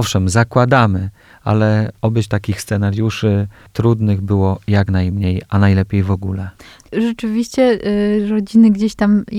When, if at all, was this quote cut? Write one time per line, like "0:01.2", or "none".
none